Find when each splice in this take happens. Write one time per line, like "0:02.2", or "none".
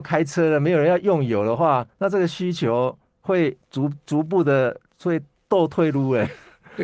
none